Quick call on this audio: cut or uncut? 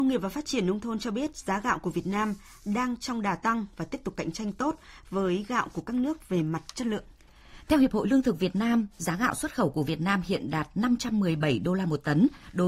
uncut